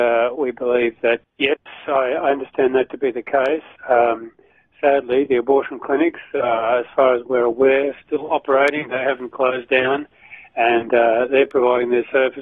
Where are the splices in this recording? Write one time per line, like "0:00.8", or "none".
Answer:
0:01.2
0:03.8